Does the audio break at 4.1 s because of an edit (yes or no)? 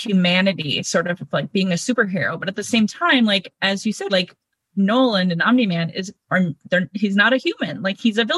yes